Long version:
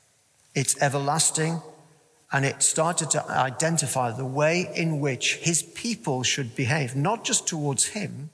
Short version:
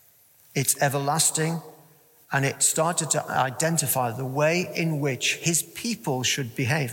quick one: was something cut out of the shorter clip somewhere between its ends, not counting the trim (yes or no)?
no